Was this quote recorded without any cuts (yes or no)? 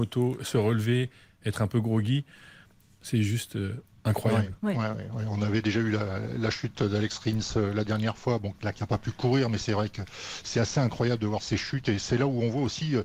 no